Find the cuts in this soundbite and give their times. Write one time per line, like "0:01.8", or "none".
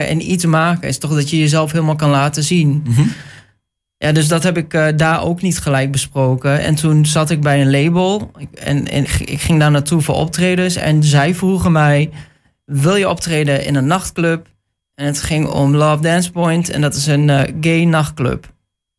0:09.1